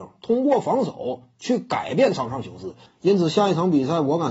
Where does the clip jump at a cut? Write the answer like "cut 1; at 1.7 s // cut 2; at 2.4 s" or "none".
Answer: cut 1; at 2.9 s